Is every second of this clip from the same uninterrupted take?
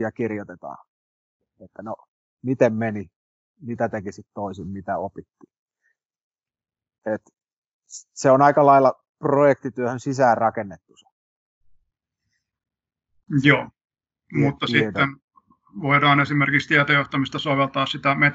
yes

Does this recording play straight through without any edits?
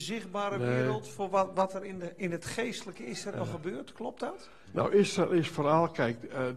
yes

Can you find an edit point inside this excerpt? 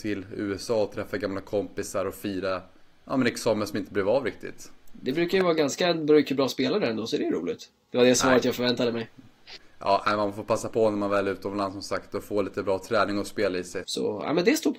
yes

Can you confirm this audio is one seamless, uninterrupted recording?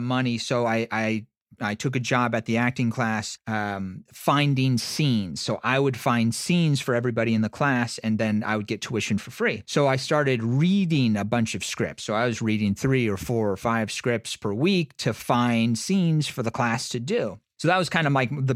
yes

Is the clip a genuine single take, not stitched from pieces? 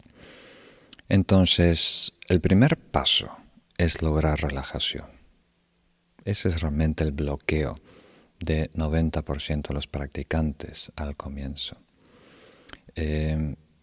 yes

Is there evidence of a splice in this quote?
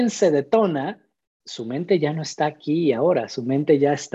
yes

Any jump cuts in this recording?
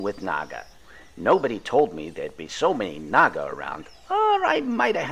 no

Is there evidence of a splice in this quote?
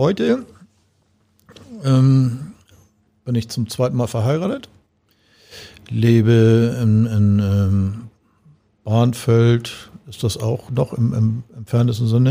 no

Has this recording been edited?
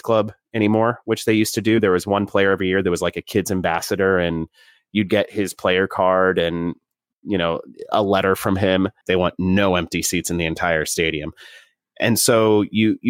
yes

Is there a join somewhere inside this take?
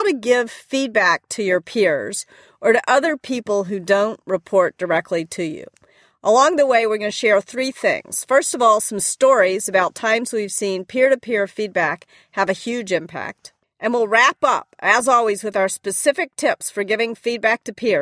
yes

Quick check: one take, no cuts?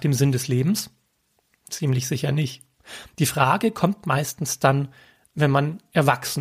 yes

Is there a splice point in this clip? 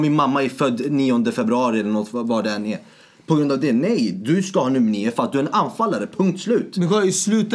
no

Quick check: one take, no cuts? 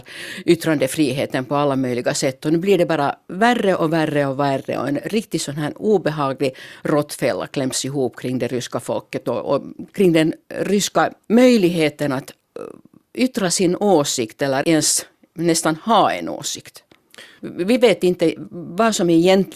no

